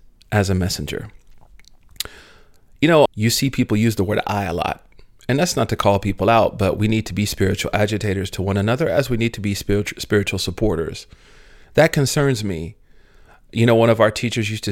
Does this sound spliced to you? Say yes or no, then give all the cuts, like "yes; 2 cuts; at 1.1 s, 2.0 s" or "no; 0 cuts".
yes; 1 cut; at 3.1 s